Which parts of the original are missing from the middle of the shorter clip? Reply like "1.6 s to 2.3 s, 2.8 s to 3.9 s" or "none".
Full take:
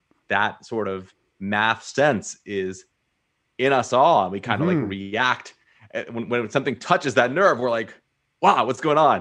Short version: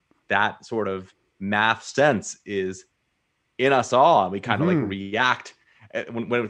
none